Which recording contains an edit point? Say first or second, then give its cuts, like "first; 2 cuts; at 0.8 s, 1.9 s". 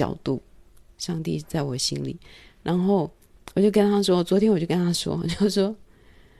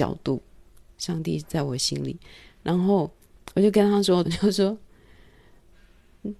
second; 1 cut; at 4.2 s